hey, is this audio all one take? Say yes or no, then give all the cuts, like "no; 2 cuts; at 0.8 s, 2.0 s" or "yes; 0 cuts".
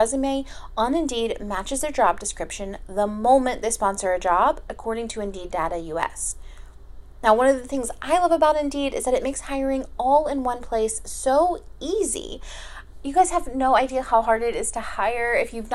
yes; 0 cuts